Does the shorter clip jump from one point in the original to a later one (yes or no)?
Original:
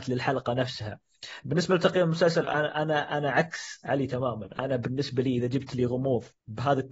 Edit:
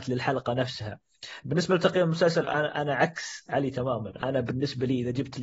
yes